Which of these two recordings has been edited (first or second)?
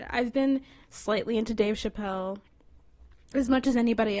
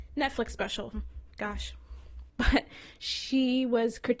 second